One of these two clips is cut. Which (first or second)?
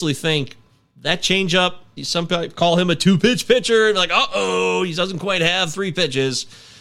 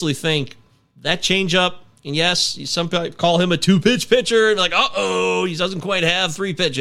first